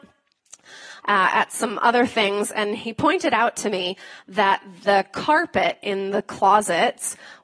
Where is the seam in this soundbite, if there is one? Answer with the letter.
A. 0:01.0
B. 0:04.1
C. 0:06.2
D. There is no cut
A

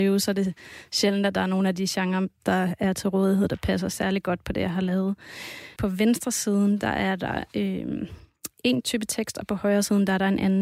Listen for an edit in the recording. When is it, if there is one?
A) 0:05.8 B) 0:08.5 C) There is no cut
A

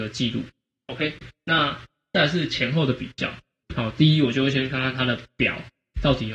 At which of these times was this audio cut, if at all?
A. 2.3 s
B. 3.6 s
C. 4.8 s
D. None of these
B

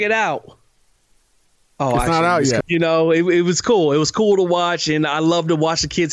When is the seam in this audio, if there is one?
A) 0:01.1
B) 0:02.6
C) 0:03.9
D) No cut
B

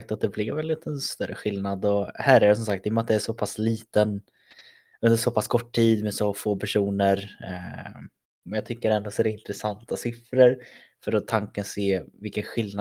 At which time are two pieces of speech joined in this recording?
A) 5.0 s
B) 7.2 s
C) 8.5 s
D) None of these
C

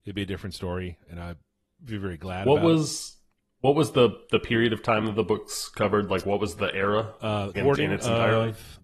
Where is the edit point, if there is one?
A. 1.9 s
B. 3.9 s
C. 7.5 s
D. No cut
C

